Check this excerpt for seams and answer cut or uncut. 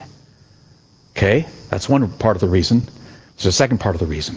uncut